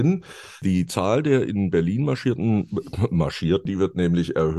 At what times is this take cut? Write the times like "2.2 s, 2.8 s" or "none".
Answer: 3.7 s

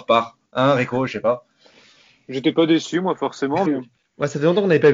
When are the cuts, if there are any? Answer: 3.7 s

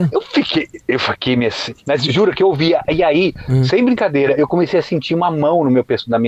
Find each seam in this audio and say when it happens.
none

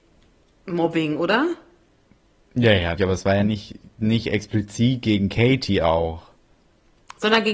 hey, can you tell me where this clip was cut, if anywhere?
3.0 s

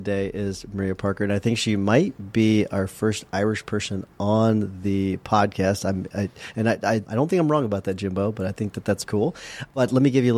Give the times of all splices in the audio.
7.1 s, 9.0 s

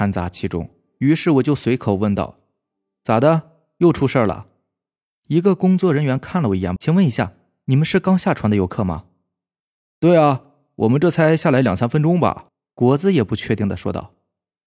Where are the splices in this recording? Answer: 6.8 s, 12.5 s

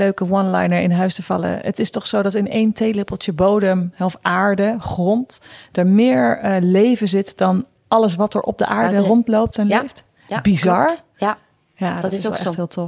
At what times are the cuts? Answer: none

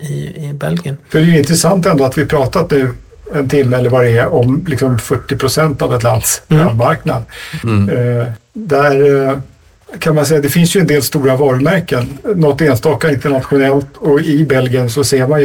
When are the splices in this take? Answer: none

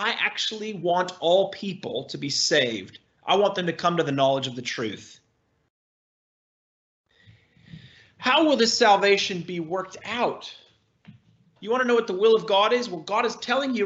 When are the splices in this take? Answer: 11.6 s

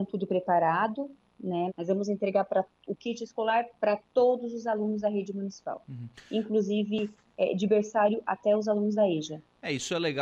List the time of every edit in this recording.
1.7 s

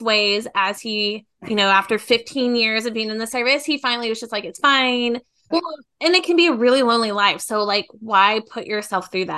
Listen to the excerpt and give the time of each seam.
1.4 s, 5.5 s

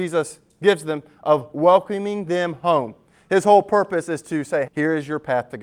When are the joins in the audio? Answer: 4.7 s

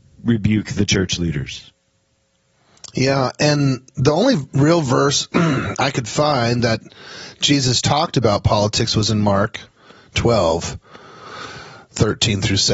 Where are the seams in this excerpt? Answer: none

